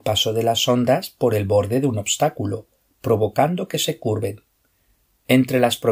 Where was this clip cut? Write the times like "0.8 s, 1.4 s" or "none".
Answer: none

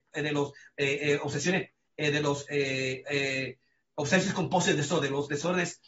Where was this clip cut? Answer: none

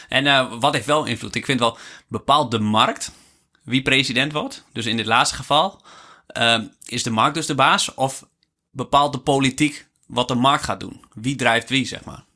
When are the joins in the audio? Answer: none

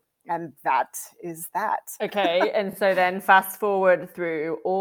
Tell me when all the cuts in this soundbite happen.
none

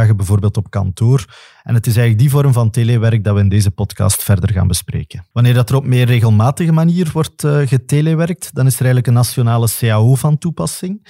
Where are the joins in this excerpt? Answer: 5.3 s

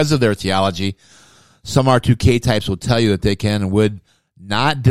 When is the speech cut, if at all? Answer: none

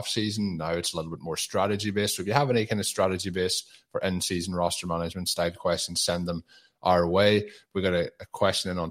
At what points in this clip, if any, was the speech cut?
none

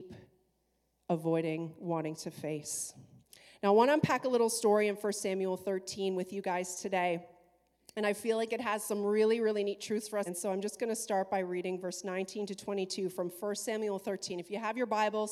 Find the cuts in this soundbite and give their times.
10.3 s

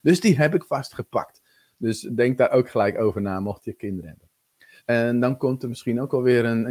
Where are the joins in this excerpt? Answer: 4.8 s

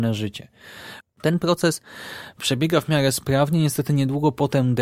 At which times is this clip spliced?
1.0 s

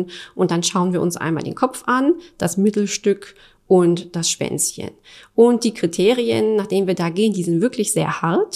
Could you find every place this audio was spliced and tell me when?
none

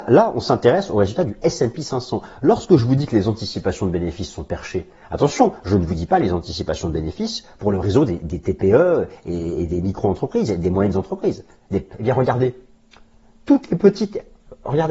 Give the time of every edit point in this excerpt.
11.9 s

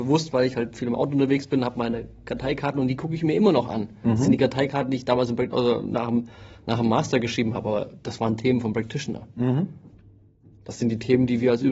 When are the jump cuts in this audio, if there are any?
none

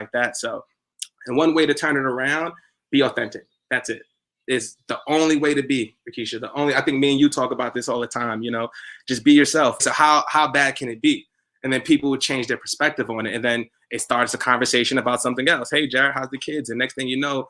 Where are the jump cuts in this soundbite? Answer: 9.8 s

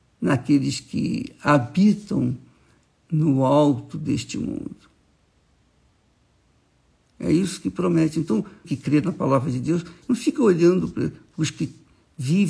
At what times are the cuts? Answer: 8.6 s, 10.0 s

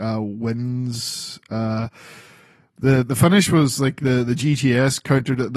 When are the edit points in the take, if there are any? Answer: none

